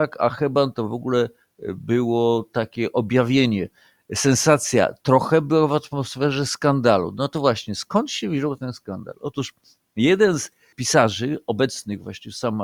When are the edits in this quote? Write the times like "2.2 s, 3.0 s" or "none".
none